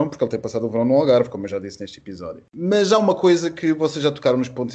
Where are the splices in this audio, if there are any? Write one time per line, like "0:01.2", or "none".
none